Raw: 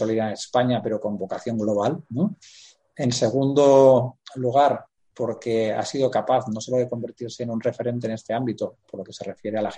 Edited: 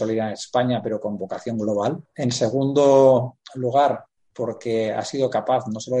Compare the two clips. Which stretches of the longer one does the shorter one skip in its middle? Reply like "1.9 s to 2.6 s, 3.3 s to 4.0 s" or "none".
2.1 s to 2.9 s